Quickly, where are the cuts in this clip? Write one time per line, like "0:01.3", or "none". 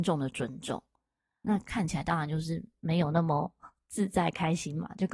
0:01.4